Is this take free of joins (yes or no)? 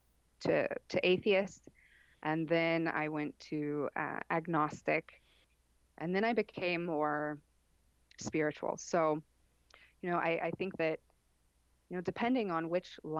yes